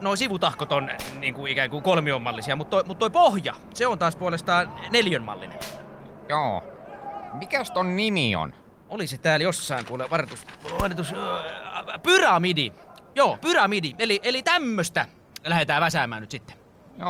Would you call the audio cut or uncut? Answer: uncut